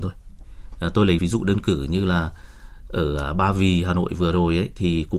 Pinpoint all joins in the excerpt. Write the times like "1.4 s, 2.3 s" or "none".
1.2 s